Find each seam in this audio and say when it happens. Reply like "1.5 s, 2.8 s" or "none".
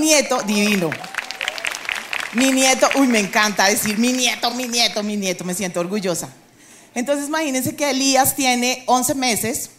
none